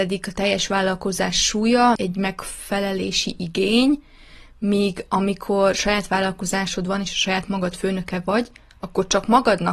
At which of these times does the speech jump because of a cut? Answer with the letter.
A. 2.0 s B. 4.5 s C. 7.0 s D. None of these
A